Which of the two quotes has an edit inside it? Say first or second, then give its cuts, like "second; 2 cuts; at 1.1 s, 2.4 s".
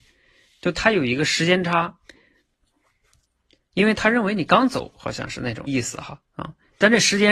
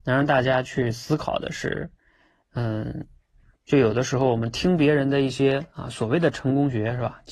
first; 1 cut; at 5.7 s